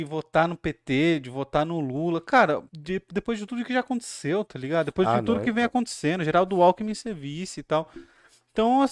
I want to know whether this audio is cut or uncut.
cut